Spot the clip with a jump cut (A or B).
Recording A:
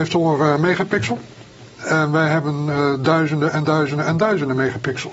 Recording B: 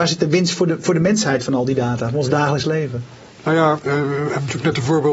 A